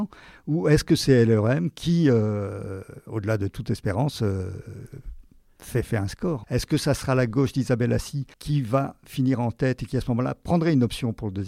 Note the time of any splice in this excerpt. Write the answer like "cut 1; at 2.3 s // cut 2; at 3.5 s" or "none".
cut 1; at 6.4 s // cut 2; at 8.3 s